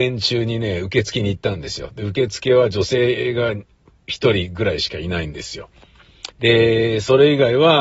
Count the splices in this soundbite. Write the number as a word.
one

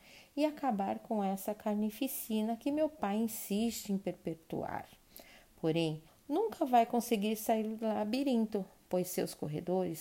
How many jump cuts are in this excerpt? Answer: one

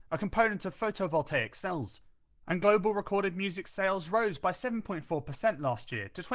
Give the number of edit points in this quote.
one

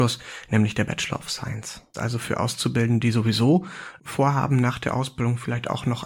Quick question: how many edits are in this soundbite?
one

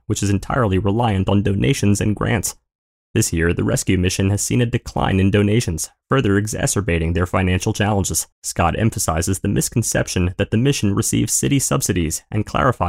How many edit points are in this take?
one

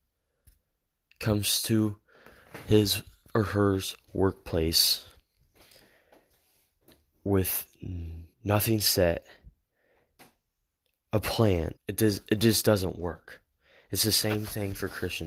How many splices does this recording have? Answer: two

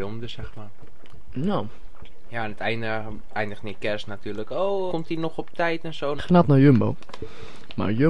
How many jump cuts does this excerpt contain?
two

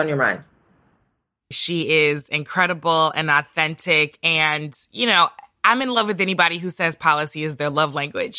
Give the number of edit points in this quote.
one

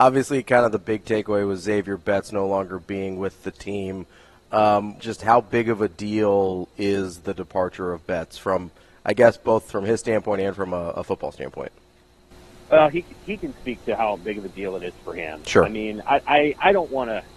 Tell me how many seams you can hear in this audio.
one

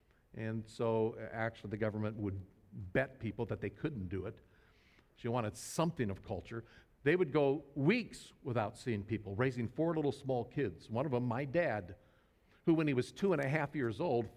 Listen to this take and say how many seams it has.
two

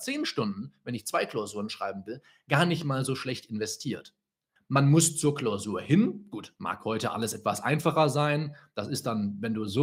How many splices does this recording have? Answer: one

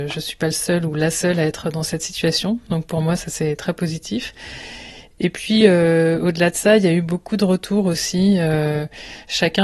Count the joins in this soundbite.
zero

